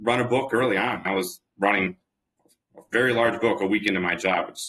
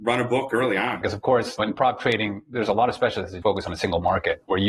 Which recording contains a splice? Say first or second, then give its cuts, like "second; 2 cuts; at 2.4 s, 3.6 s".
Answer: second; 2 cuts; at 1.0 s, 3.4 s